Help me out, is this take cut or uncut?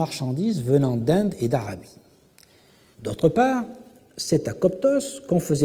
cut